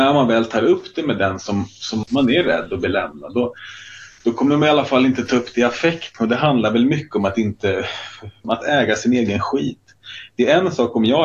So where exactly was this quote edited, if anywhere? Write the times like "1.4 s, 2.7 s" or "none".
2.0 s, 6.1 s, 8.4 s